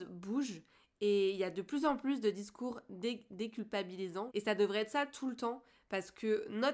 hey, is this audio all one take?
no; 1 cut; at 4.3 s

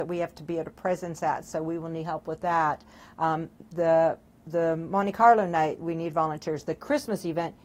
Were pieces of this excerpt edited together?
no; 0 cuts

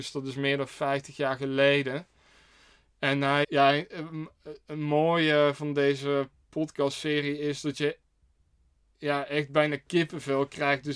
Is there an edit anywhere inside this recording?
yes; 1 cut; at 3.4 s

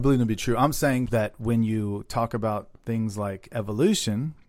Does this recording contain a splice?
yes; 1 cut; at 1.1 s

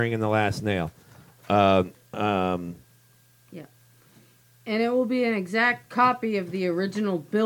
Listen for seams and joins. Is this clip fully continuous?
yes; 0 cuts

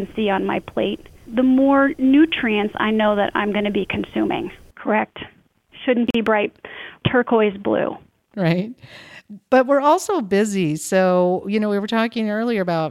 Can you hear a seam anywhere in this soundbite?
yes; 1 cut; at 4.7 s

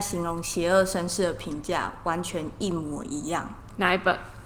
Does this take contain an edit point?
no; 0 cuts

